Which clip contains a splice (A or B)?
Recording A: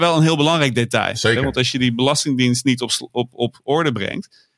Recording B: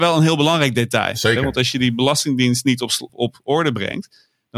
B